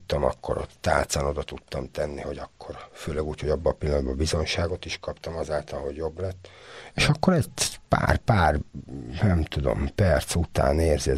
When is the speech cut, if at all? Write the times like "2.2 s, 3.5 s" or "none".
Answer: 6.9 s

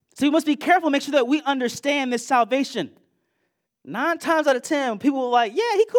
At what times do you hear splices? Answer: 3.7 s

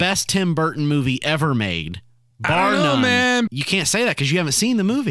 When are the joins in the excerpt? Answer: 3.5 s

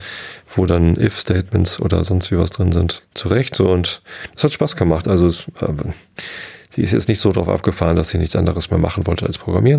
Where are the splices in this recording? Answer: 3.0 s, 5.0 s

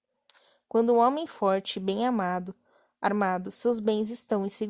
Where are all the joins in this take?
3.4 s

